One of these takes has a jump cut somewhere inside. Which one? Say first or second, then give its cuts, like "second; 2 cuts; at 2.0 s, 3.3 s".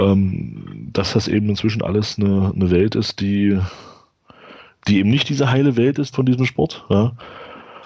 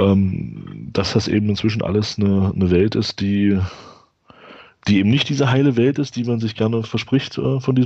first; 1 cut; at 6.1 s